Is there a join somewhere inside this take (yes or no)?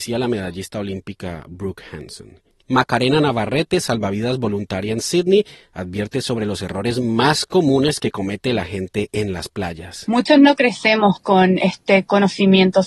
no